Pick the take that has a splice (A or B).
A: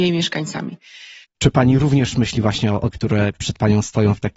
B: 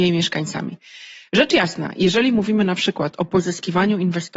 A